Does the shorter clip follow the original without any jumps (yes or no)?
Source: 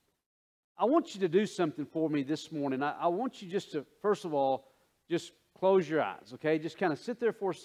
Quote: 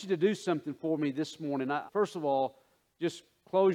no